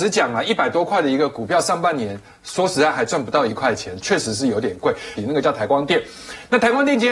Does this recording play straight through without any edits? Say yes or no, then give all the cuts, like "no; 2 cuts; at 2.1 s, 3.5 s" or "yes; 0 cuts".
no; 1 cut; at 5.2 s